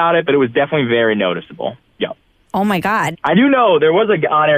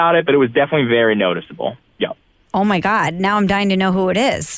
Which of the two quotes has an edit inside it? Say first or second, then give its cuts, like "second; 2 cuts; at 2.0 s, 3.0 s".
first; 1 cut; at 3.1 s